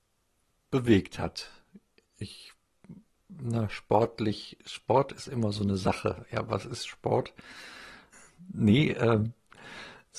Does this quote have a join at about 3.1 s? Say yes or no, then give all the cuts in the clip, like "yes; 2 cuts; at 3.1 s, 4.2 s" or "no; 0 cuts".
no; 1 cut; at 8.1 s